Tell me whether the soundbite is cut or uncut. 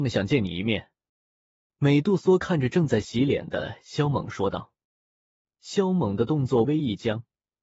cut